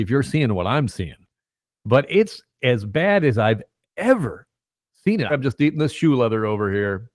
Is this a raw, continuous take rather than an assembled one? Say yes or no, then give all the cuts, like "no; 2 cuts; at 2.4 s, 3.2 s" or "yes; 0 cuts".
no; 1 cut; at 5.3 s